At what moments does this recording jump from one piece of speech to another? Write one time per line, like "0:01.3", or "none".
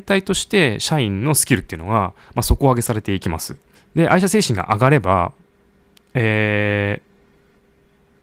0:03.7